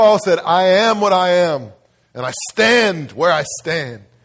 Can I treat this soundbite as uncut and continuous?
yes; 0 cuts

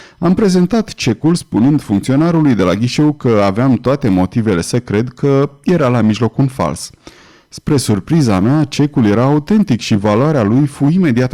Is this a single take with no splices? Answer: yes; 0 cuts

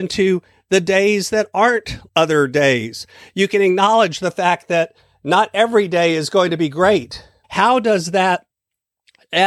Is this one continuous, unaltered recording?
no; 2 cuts; at 2.1 s, 7.4 s

